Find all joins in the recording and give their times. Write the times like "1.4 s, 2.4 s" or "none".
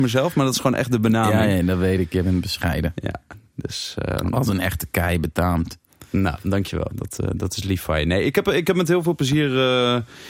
none